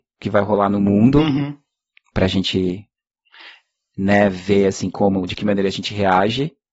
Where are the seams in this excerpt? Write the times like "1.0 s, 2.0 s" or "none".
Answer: none